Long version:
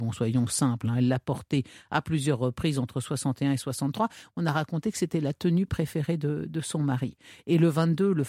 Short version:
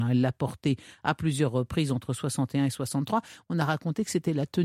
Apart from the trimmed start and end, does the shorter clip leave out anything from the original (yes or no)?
no